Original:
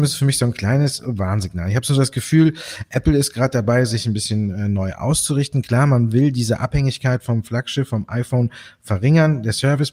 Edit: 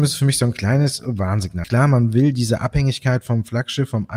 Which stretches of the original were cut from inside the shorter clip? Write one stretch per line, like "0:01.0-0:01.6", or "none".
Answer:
0:01.6-0:05.6